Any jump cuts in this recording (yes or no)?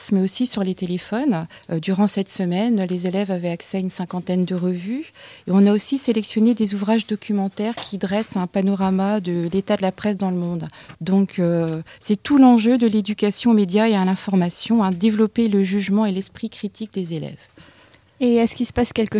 yes